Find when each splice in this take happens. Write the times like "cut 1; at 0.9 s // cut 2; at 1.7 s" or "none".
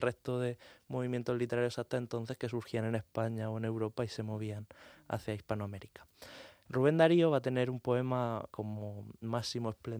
cut 1; at 8.5 s